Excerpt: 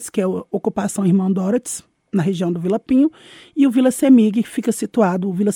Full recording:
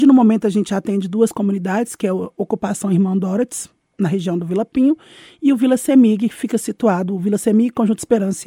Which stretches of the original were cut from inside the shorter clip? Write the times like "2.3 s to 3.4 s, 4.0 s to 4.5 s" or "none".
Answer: none